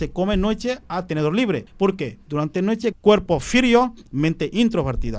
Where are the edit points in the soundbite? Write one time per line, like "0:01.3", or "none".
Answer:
0:01.7
0:02.9